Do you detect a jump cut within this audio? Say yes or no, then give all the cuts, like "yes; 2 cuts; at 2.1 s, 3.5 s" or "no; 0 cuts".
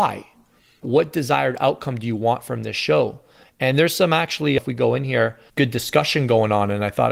yes; 1 cut; at 5.5 s